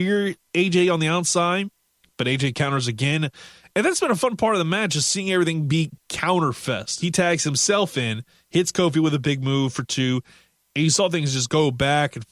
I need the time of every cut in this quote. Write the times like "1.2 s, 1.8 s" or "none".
7.0 s, 10.7 s

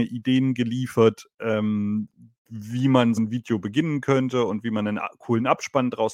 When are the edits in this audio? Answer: 3.2 s

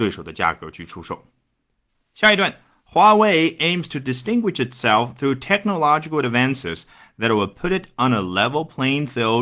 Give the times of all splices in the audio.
none

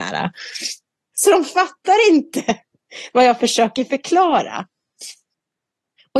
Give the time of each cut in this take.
1.1 s

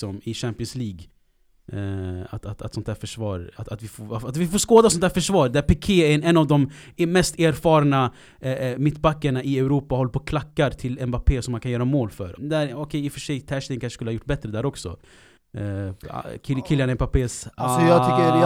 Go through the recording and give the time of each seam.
3.6 s, 12.4 s

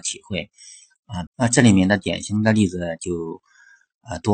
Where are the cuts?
1.3 s

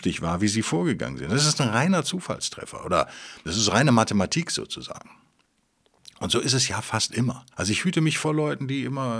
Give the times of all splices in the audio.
7.5 s

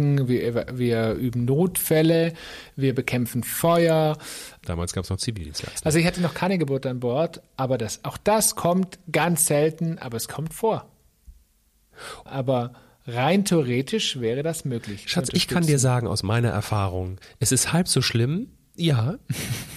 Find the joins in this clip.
4.6 s, 12.3 s, 18.8 s

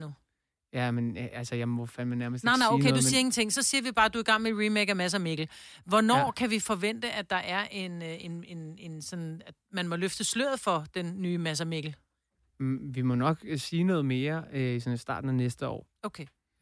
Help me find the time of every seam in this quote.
none

